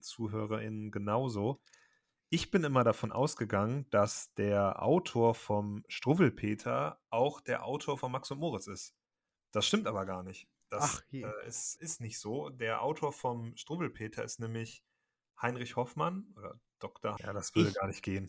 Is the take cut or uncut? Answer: cut